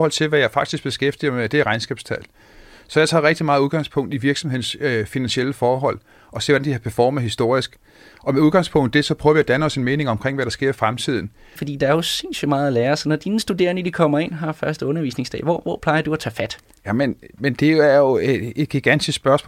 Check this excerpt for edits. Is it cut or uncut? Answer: cut